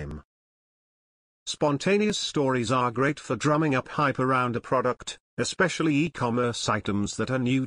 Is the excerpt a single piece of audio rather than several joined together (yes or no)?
yes